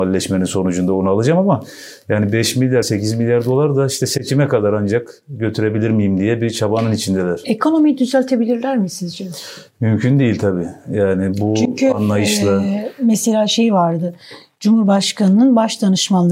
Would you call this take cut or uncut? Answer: cut